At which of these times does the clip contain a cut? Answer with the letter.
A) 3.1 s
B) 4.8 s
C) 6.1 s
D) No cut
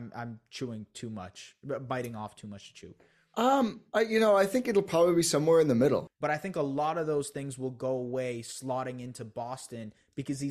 C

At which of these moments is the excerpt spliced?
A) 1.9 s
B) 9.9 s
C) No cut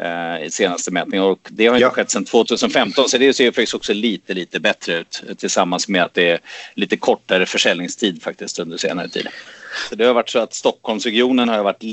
B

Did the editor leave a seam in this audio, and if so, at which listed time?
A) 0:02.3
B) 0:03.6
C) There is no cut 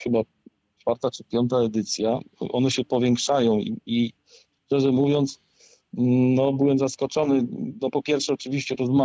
C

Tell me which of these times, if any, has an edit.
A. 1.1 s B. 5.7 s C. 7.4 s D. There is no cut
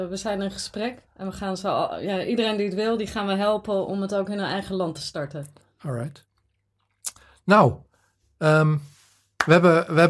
A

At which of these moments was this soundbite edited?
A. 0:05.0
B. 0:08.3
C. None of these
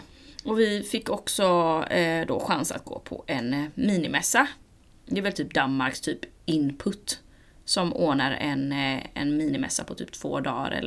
C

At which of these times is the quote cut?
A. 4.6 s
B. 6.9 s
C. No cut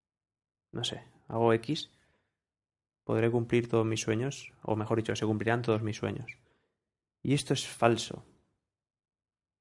C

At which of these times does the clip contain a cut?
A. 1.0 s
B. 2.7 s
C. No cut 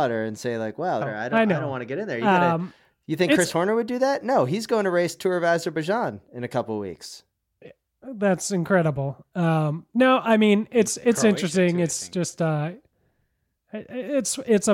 A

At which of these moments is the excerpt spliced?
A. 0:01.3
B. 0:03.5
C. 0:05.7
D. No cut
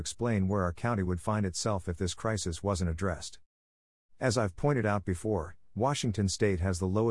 D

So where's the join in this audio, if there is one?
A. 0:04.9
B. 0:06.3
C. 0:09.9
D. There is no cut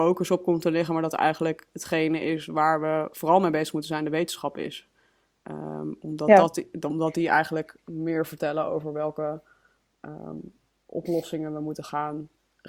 D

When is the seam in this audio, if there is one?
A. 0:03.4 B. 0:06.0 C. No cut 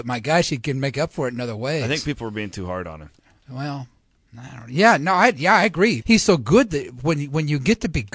B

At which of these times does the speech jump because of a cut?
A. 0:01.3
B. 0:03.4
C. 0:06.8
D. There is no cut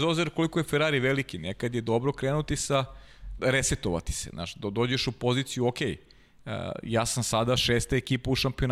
B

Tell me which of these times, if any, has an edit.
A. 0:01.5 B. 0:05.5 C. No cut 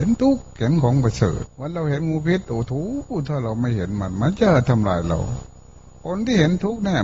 A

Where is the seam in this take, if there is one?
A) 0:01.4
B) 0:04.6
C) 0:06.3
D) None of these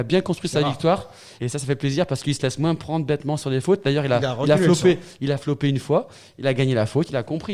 A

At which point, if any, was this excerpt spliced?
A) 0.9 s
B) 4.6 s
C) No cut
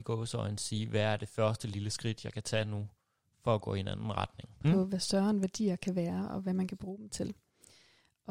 B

